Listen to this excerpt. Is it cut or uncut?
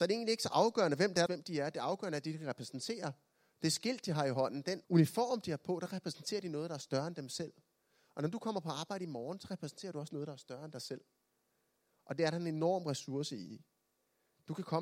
cut